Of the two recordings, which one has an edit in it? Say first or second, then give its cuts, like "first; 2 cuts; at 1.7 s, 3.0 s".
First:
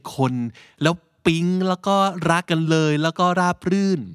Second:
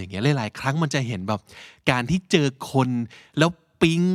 first; 1 cut; at 2.4 s